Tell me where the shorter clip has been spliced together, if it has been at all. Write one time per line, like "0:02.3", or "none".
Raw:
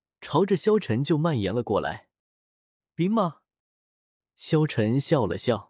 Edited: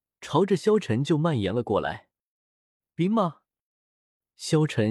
none

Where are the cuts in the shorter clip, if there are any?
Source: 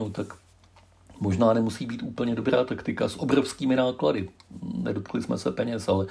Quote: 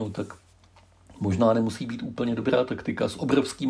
none

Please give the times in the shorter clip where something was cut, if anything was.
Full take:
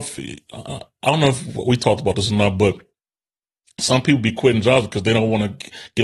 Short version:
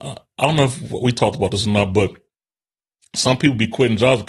none

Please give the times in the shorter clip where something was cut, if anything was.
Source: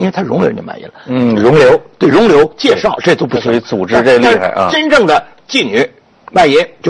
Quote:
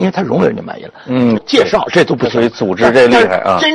0:01.3

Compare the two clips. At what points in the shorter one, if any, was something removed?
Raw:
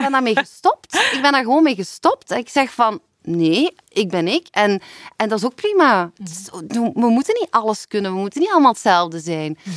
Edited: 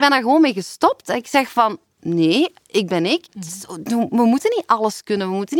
0:03.3

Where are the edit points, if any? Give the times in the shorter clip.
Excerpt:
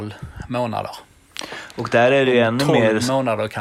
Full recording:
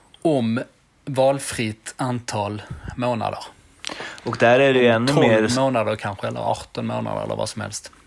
none

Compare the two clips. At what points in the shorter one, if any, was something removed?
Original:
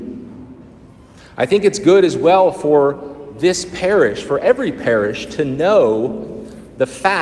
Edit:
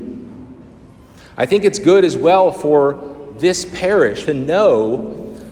0:04.2

